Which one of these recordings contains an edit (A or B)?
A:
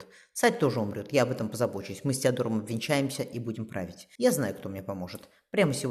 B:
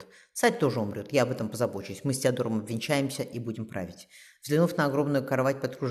A